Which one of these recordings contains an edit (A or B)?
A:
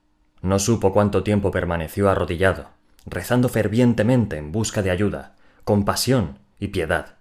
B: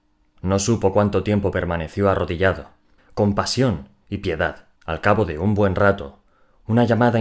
B